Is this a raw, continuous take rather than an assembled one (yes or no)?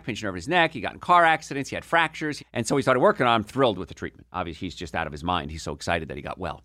no